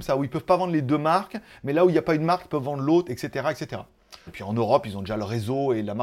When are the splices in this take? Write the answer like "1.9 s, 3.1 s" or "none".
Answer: 4.3 s